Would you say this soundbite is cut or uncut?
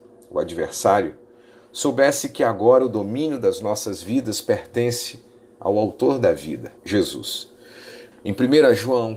cut